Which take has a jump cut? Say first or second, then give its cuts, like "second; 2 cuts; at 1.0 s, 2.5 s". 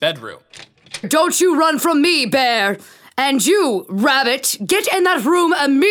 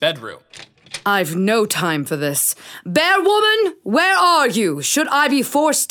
first; 1 cut; at 1.0 s